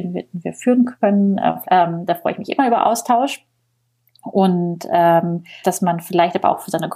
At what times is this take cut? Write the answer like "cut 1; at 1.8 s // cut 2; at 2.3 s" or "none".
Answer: cut 1; at 1.6 s // cut 2; at 5.6 s